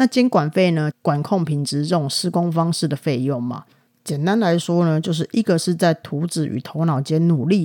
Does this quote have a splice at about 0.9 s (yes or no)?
yes